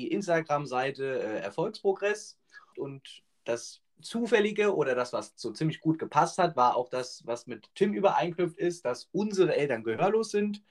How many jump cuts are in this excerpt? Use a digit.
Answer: 1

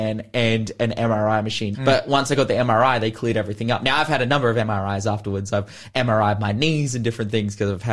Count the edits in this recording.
1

